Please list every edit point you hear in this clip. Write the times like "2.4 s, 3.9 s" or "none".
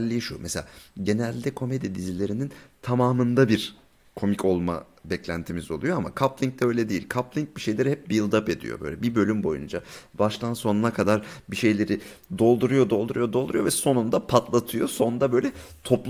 none

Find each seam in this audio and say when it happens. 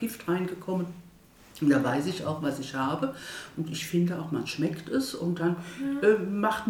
none

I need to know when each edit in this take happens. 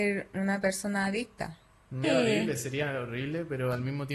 2.0 s

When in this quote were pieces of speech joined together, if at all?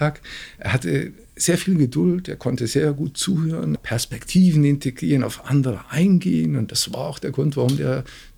3.8 s

